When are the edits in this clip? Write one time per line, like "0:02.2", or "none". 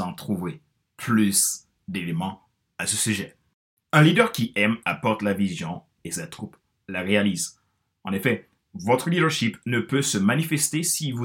none